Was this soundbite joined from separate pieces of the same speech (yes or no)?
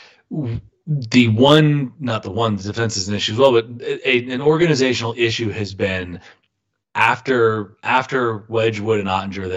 no